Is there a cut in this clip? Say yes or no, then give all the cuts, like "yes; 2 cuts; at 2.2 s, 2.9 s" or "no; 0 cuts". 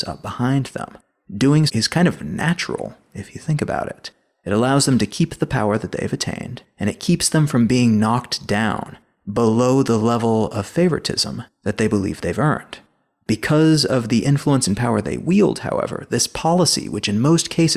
yes; 1 cut; at 1.7 s